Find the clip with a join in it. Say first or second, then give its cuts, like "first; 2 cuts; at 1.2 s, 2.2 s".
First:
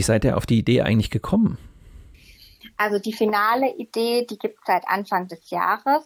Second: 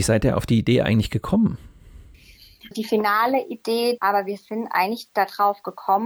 second; 2 cuts; at 2.7 s, 4.0 s